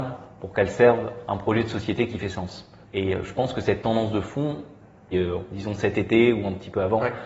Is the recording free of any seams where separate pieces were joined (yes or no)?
no